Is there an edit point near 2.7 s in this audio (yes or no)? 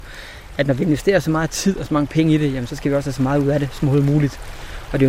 yes